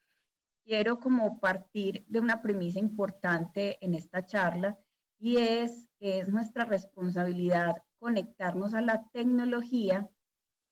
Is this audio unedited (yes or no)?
no